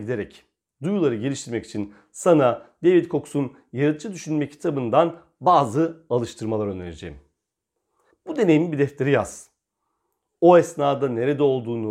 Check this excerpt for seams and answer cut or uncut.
cut